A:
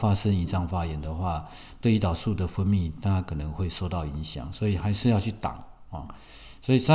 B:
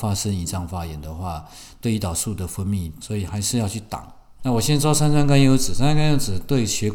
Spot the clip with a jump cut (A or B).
B